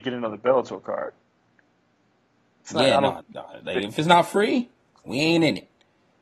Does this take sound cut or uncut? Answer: cut